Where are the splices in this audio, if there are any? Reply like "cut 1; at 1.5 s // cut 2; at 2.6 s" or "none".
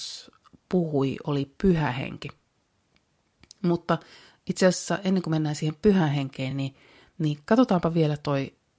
none